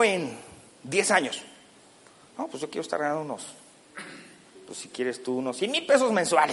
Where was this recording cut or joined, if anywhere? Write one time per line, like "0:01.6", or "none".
none